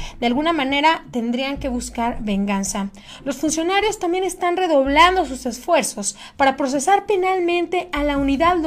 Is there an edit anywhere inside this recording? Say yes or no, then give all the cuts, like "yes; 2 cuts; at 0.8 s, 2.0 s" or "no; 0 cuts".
no; 0 cuts